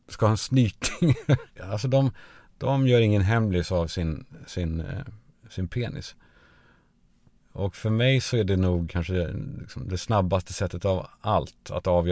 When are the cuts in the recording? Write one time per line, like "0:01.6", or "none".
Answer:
0:01.6